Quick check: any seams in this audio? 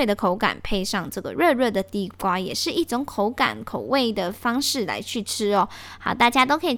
no; 0 cuts

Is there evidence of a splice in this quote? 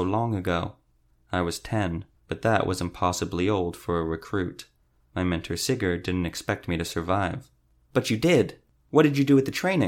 yes; 1 cut; at 2.1 s

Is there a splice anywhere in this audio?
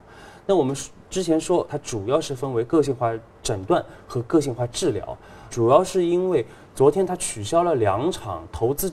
yes; 2 cuts; at 1.7 s, 5.5 s

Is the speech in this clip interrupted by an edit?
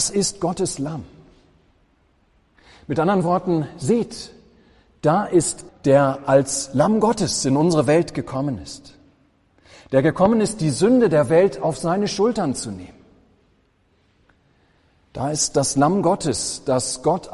yes; 1 cut; at 5.7 s

